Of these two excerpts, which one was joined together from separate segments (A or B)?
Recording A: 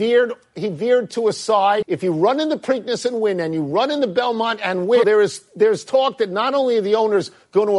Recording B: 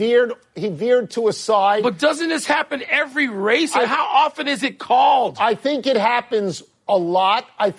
A